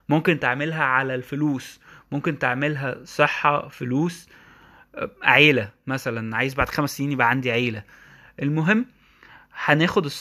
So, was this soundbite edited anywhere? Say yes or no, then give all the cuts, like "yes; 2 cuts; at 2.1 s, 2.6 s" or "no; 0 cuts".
no; 0 cuts